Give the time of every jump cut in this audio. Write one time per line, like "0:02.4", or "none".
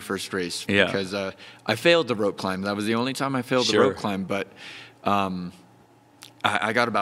none